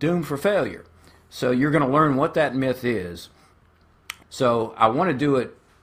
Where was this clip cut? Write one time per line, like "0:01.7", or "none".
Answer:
0:04.2